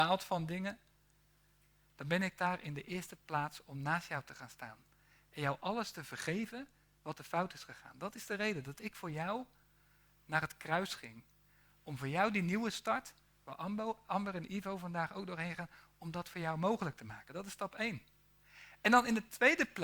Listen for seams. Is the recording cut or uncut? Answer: uncut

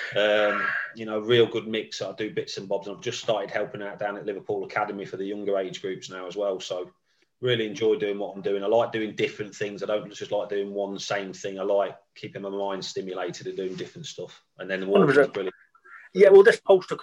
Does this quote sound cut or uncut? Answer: uncut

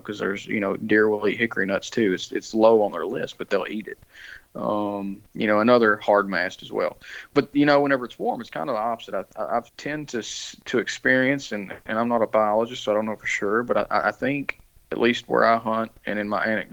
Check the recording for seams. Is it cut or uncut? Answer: cut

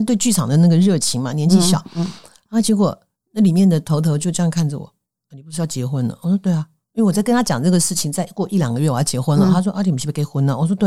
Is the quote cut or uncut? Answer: uncut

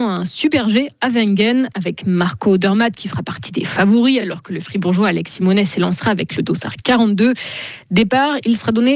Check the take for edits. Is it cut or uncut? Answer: uncut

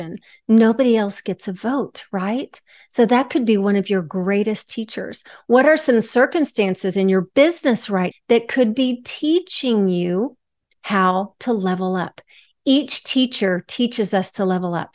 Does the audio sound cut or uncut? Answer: cut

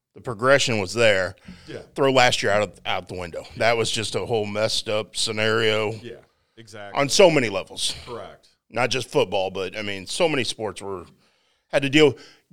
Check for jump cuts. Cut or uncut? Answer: uncut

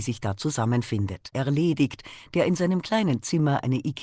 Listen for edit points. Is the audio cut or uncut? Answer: cut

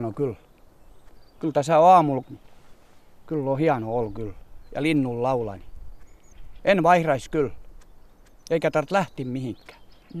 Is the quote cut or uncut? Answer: cut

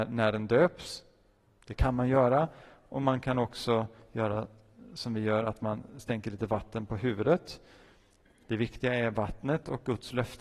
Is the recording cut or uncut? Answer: uncut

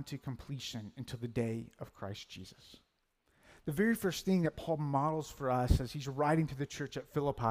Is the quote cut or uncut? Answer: uncut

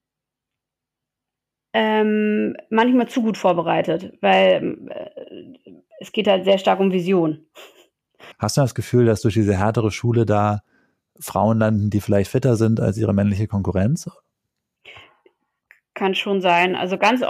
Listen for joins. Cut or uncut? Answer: cut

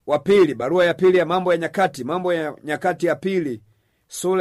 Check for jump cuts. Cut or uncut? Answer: uncut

